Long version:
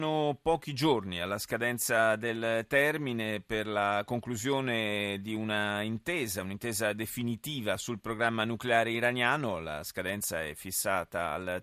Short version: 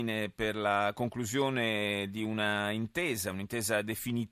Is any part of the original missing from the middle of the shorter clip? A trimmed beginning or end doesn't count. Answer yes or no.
no